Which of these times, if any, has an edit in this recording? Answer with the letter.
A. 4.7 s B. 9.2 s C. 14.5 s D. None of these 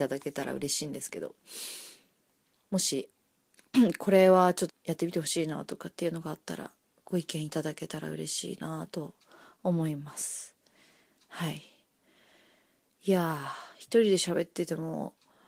A